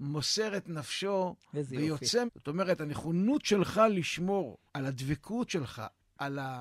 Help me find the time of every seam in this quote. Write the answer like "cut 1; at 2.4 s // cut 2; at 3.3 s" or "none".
cut 1; at 2.3 s // cut 2; at 4.7 s